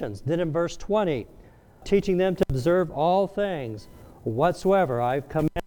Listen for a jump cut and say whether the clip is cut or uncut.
cut